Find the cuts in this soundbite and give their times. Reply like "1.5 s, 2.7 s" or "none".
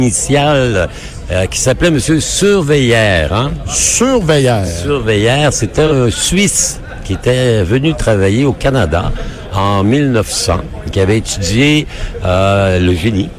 none

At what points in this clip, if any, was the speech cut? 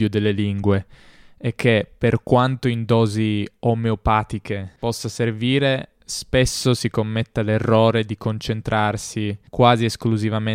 4.8 s

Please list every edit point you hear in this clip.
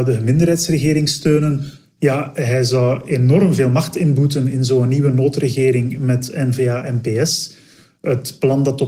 2.0 s

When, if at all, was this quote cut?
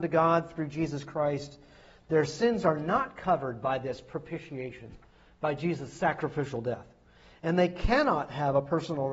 none

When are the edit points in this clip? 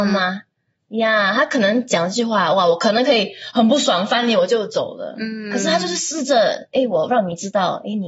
none

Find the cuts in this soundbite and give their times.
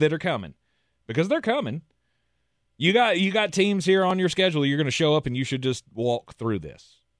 none

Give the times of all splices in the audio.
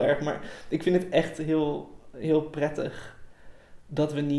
none

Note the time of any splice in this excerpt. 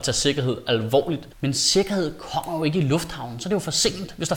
1.3 s

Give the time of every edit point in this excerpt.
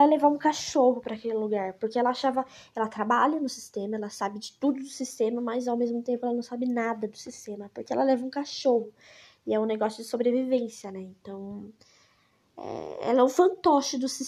none

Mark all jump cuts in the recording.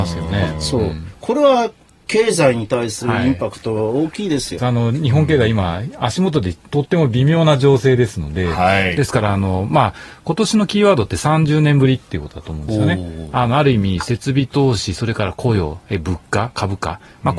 4.6 s

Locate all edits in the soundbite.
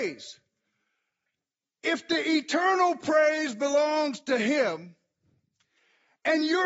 none

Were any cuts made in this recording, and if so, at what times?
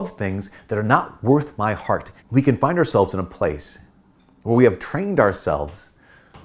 2.2 s

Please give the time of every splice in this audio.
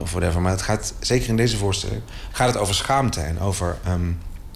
2.3 s

